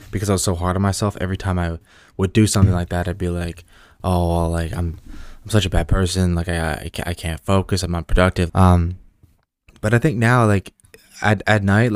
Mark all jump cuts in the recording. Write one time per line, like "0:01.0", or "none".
0:08.5